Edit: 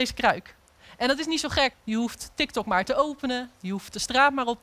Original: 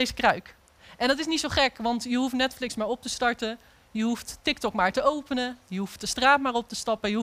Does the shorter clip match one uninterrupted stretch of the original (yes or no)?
no